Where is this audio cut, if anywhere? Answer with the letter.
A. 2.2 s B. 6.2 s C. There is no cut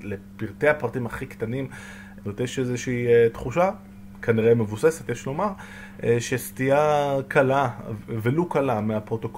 A